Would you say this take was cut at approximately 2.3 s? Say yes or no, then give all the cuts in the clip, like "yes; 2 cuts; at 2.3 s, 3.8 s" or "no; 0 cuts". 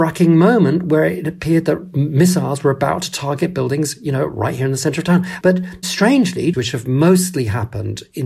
no; 2 cuts; at 5.4 s, 6.5 s